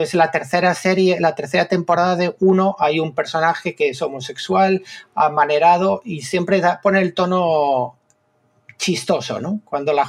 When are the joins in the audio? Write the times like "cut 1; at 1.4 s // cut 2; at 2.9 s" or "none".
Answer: none